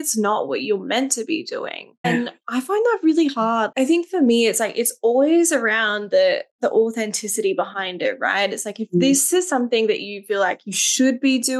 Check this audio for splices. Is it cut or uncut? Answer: cut